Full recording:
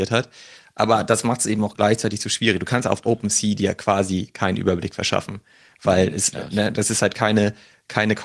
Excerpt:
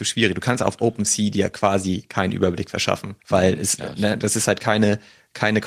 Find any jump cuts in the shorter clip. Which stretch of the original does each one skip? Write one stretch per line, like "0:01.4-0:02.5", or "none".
0:05.5-0:05.7